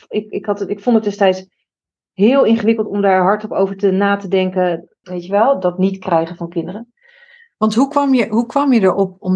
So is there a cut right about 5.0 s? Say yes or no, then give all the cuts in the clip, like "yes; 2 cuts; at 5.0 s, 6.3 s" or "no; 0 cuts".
yes; 1 cut; at 5.0 s